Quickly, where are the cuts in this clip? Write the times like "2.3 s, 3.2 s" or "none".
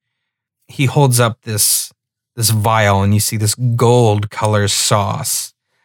none